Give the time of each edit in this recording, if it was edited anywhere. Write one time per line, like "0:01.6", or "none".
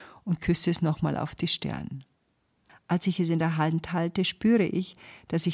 0:02.7